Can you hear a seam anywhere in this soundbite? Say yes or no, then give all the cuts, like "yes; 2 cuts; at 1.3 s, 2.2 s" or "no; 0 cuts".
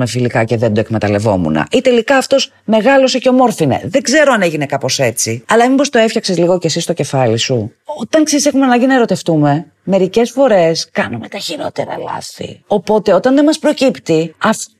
no; 0 cuts